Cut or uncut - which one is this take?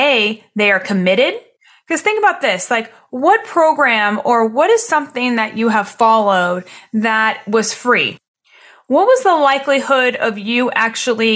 uncut